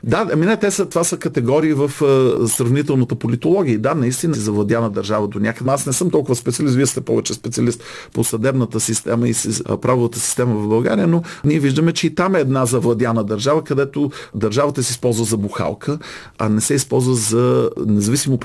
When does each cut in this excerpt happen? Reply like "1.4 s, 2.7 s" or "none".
4.3 s, 5.6 s